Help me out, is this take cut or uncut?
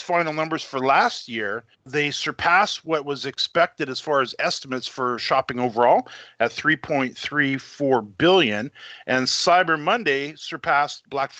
cut